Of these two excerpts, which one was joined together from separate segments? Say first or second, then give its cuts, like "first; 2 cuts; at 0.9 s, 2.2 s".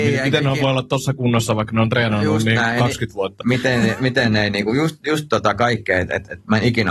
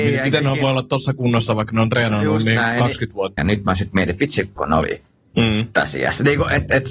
second; 2 cuts; at 3.4 s, 4.6 s